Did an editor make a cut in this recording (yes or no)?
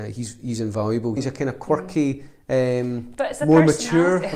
yes